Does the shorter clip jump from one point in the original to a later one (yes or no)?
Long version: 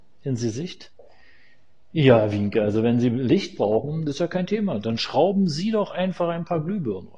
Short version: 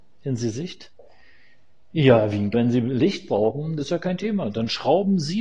yes